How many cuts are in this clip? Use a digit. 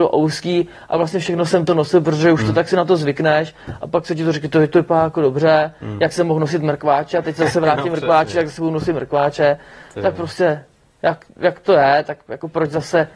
1